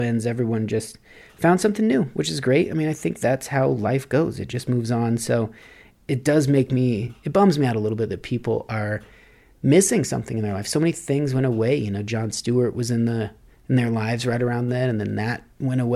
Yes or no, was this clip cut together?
no